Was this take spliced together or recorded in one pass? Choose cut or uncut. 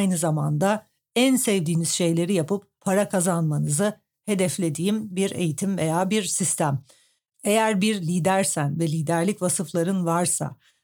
cut